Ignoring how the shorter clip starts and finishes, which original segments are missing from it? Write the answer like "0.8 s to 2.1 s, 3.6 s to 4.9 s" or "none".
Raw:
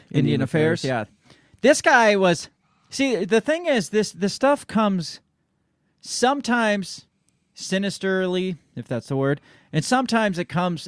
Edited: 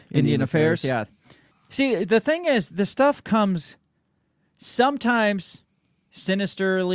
1.5 s to 2.7 s, 3.9 s to 4.1 s